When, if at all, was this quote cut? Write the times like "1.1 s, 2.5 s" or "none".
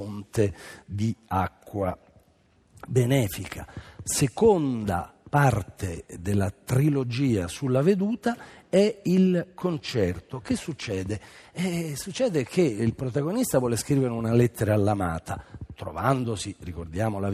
none